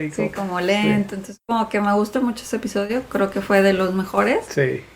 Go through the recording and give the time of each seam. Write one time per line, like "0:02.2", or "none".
0:02.1